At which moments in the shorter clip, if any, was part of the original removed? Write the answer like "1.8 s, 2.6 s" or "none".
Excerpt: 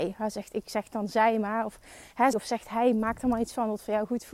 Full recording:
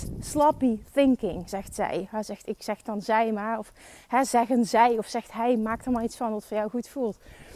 2.3 s